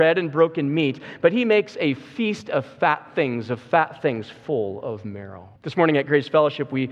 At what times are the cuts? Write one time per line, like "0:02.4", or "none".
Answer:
0:05.6